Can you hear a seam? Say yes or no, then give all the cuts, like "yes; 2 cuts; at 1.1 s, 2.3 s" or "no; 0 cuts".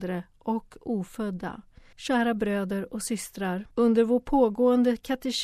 yes; 2 cuts; at 1.9 s, 3.7 s